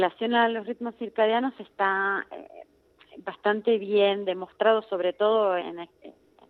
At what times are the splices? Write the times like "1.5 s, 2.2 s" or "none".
5.6 s